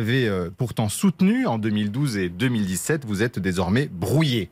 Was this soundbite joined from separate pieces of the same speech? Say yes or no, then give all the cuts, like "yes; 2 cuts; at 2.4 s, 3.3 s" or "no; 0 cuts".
no; 0 cuts